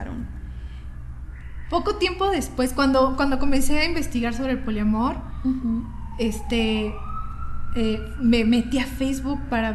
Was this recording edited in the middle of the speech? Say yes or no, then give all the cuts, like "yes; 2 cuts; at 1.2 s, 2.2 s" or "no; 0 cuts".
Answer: no; 0 cuts